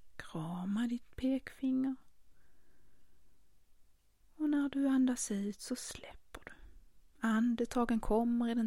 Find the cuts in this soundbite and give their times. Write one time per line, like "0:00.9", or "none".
none